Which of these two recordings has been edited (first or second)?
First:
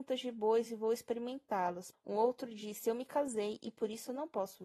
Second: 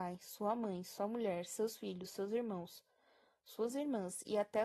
first